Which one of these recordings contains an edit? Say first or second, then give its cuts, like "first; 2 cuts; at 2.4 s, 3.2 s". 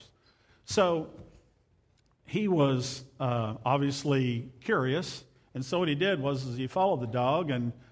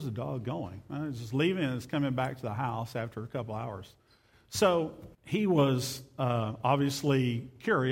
second; 1 cut; at 5.1 s